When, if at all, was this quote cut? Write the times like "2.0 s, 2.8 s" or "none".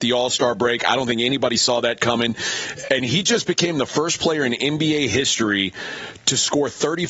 none

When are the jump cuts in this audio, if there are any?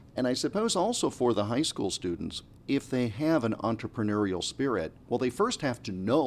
none

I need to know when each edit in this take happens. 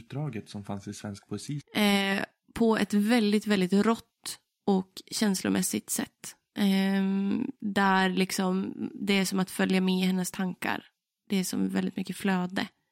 1.6 s

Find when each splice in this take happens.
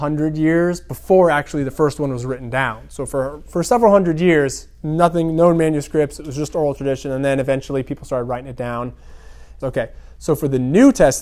9.6 s

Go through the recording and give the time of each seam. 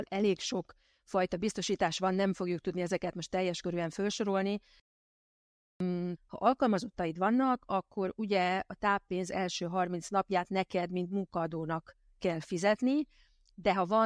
6.2 s

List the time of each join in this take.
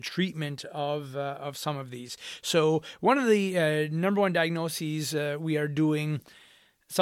none

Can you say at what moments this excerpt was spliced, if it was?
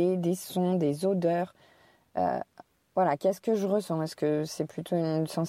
none

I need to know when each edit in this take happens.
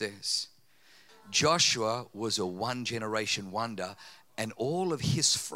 1.1 s

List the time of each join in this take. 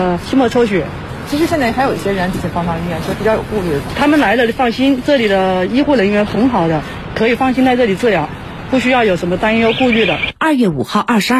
1.3 s, 10.3 s

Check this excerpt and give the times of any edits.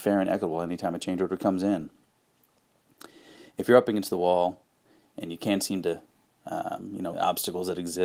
7.1 s

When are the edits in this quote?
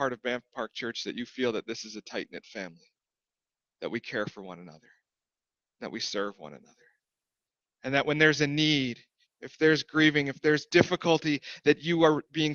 9.2 s

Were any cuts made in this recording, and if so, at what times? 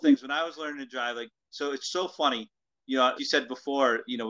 3.2 s

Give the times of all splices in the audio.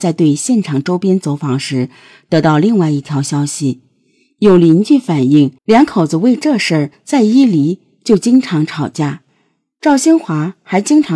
5.6 s

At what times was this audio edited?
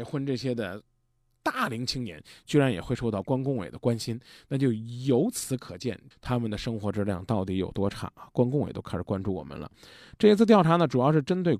6.1 s

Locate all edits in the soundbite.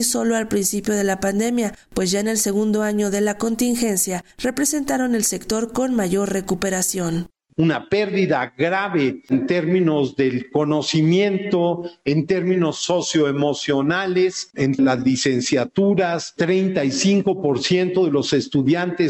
12.0 s

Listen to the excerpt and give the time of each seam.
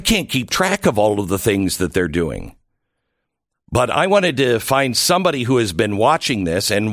none

